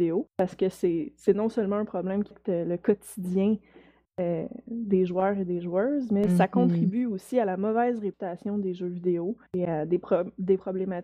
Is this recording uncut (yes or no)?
no